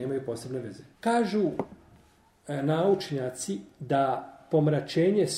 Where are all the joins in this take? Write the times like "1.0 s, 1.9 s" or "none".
0.9 s